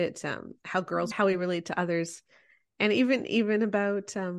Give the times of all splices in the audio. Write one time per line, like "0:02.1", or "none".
0:01.1